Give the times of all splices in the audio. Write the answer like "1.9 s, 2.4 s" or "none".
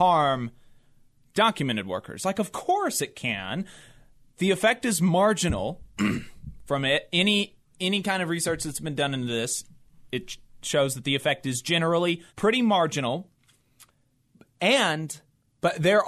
12.3 s